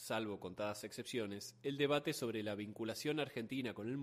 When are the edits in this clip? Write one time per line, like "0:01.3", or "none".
none